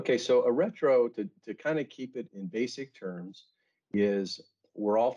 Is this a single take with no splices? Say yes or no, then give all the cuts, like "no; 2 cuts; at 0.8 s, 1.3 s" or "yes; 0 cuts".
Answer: yes; 0 cuts